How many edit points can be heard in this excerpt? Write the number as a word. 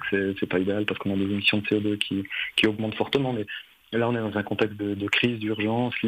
zero